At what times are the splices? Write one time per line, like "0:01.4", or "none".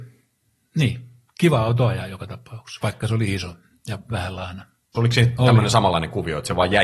0:04.9